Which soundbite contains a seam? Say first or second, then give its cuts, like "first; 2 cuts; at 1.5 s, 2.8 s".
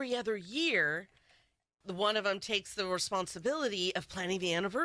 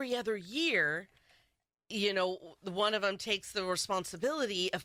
first; 1 cut; at 1.8 s